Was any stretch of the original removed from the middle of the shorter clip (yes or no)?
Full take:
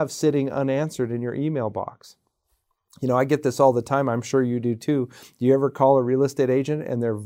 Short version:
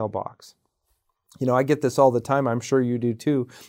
no